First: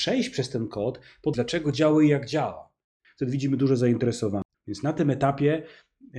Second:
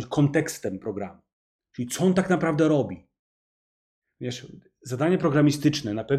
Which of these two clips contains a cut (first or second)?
first